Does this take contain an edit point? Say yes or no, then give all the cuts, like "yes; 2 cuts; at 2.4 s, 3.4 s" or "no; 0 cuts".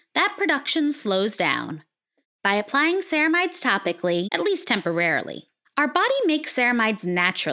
yes; 3 cuts; at 2.2 s, 4.3 s, 5.6 s